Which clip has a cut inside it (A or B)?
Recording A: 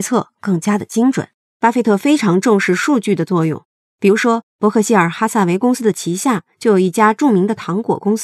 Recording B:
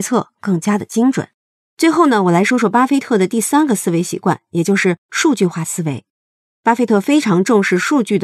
A